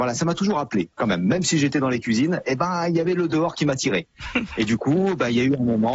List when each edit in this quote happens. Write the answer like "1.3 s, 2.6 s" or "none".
none